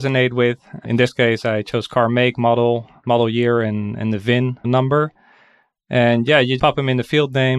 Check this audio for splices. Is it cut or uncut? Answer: cut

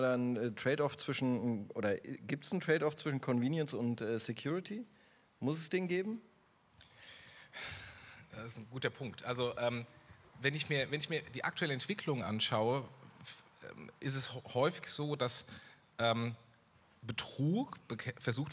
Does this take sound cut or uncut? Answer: uncut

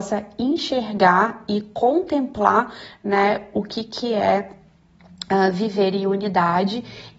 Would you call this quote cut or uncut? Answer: uncut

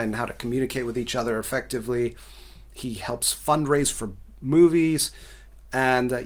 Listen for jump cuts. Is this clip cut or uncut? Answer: uncut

